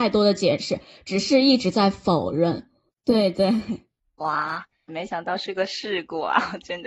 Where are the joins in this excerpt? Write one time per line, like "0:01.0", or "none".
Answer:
0:02.9
0:04.9

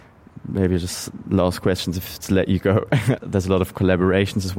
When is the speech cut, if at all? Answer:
0:03.2

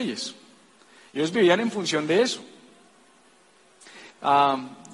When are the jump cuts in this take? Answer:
none

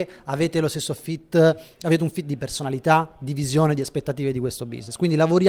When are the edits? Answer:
none

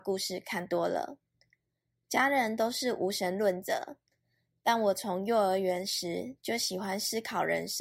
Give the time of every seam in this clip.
none

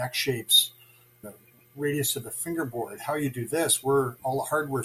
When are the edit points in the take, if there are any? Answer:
0:01.2

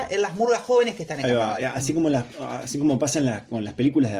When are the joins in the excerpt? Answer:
none

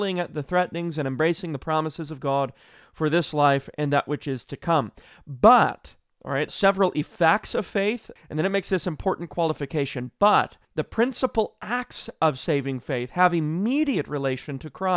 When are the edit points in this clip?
0:06.5
0:08.2
0:10.6

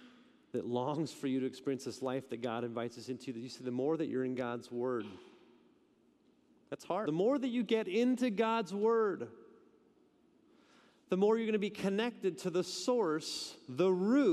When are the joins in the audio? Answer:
0:07.0

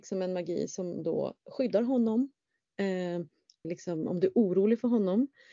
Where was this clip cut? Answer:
0:03.6

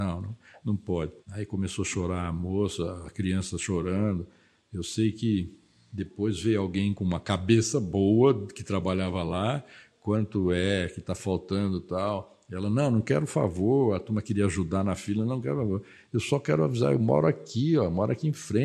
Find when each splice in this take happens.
0:01.2

